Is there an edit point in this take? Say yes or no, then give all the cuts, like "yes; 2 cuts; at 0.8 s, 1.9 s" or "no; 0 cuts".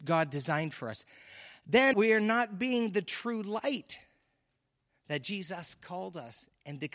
yes; 1 cut; at 1.9 s